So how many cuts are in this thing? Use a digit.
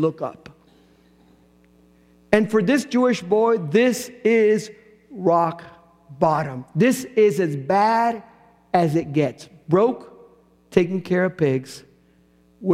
0